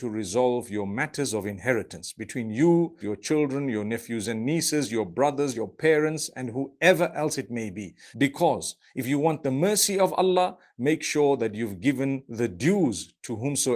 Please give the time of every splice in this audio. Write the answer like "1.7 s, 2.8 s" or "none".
3.0 s, 5.5 s, 8.1 s